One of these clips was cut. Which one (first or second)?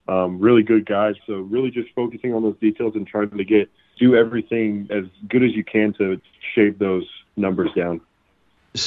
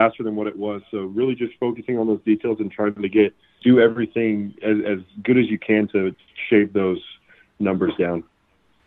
first